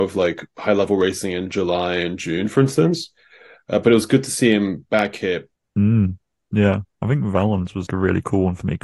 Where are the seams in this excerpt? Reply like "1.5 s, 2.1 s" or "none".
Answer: 5.6 s, 7.9 s